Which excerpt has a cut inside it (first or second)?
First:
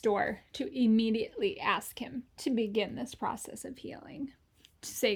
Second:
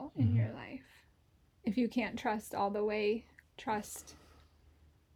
second